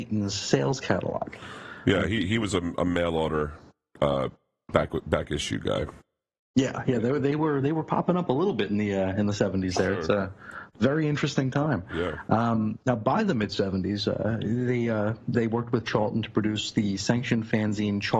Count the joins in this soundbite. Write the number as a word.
zero